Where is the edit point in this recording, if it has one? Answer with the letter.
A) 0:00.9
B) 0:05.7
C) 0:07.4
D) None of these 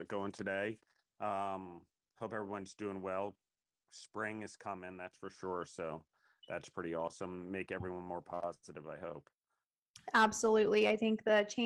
D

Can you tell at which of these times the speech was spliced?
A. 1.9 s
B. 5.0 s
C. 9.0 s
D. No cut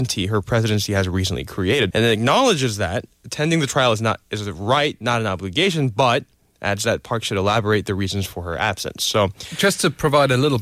A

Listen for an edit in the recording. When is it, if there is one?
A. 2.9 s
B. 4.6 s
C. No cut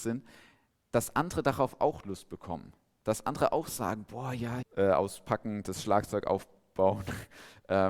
B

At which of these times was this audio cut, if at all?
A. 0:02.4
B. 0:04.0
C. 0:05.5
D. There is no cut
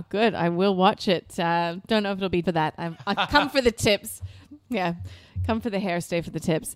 A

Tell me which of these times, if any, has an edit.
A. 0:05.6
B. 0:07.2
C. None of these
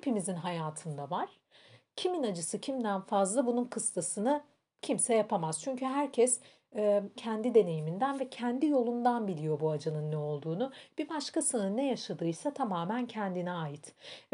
B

